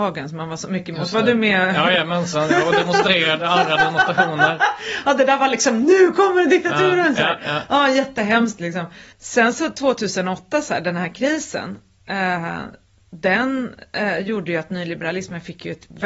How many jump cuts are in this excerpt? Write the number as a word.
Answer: one